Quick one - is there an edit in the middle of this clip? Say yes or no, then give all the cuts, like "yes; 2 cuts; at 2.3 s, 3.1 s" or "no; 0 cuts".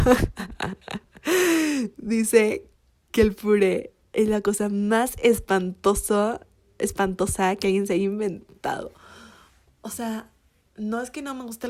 no; 0 cuts